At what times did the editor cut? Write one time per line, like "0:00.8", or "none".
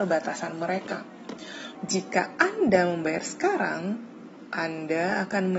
0:01.8